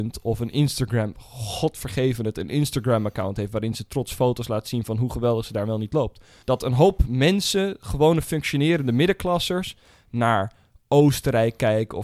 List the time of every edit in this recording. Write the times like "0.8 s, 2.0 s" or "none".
6.4 s